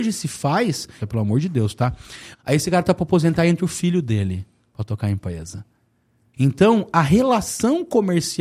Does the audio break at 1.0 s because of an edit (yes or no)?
yes